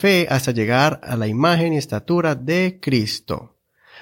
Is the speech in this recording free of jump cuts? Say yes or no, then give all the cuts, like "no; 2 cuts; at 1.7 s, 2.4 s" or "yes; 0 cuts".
yes; 0 cuts